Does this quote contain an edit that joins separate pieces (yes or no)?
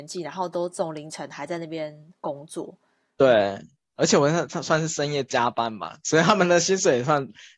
no